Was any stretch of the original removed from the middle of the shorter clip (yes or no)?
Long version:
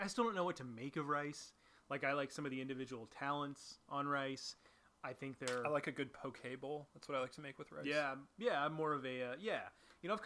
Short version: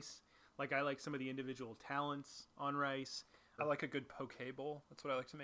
yes